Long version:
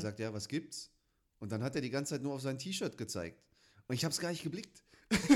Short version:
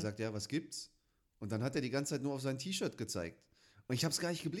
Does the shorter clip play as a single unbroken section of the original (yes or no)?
yes